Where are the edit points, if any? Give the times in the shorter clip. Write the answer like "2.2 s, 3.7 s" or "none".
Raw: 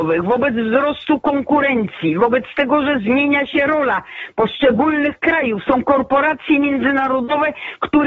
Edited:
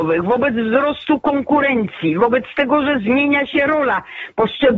none